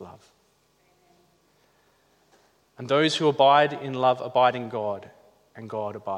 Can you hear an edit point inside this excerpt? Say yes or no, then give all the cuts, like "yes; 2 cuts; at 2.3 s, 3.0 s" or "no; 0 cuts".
no; 0 cuts